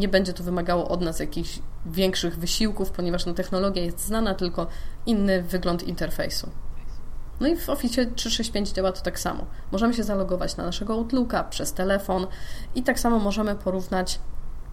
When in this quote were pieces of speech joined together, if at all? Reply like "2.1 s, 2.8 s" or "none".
7.3 s